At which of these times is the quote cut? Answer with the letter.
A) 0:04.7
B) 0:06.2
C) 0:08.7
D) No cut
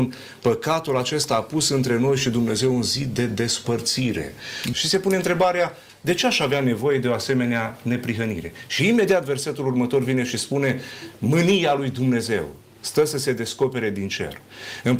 A